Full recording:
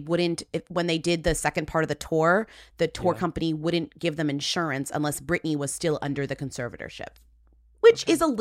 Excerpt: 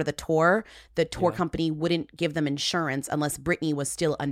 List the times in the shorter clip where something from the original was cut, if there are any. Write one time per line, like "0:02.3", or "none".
none